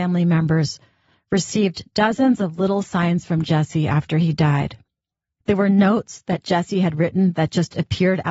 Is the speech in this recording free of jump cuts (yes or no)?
no